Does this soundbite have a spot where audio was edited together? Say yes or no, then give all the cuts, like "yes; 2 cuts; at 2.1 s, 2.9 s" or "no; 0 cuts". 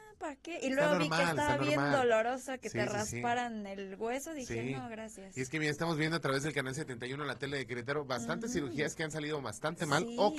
no; 0 cuts